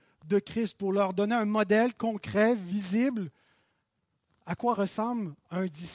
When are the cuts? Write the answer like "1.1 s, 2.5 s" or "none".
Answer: none